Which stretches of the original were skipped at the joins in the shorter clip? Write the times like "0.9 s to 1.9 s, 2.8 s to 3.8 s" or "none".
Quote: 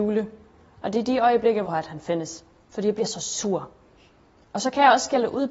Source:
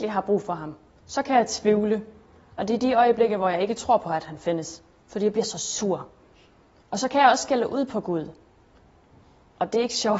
3.4 s to 4.0 s

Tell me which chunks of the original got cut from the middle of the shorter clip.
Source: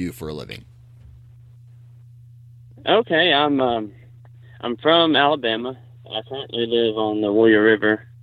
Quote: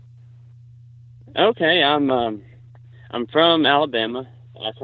none

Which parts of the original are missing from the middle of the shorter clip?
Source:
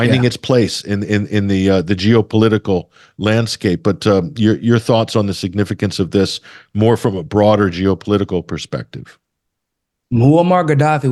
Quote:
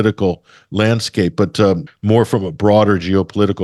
4.3 s to 6.6 s

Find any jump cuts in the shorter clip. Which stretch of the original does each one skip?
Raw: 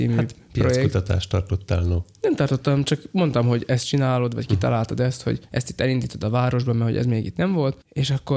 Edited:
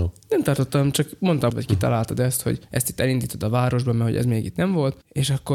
3.4 s to 4.3 s

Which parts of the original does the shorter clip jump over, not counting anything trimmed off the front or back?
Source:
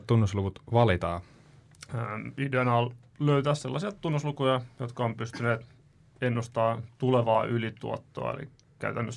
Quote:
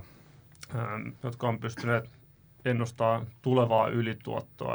2.3 s to 4.7 s

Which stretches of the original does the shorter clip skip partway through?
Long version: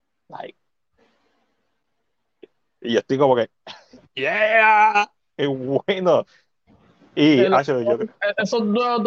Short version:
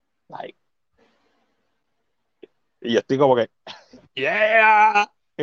none

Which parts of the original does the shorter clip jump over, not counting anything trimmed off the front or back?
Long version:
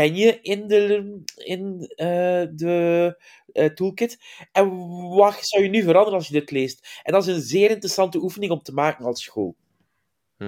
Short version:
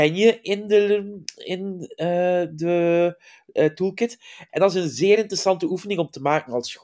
4.5 s to 7.0 s

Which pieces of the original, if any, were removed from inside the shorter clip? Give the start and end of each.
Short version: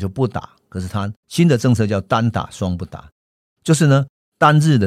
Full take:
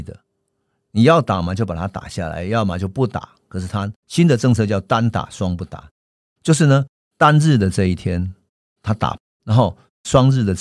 none

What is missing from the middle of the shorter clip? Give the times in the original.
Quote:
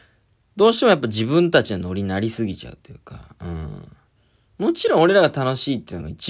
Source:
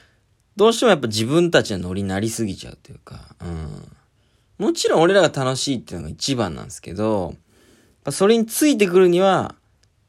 none

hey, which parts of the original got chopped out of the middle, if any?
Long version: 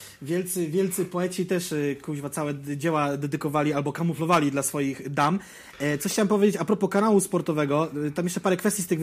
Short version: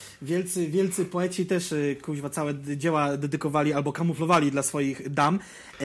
none

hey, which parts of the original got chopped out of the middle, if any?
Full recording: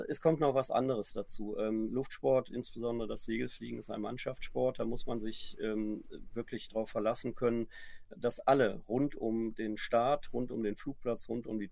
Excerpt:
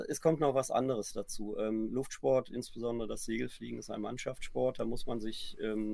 none

